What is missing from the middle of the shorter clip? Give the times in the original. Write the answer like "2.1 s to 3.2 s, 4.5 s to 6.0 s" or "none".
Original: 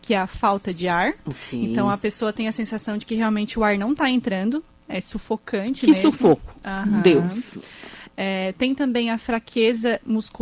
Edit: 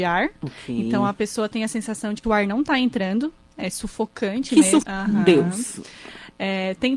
3.1 s to 3.5 s, 6.1 s to 6.6 s